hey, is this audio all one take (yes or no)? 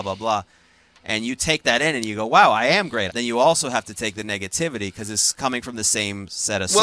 no